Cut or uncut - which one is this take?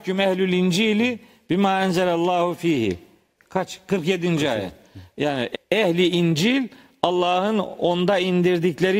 cut